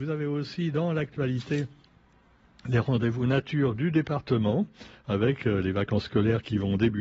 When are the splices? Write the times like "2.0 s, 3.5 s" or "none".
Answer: none